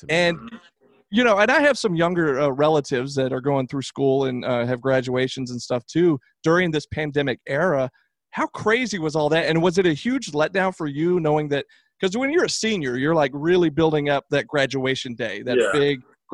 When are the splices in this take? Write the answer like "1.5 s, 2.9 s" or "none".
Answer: none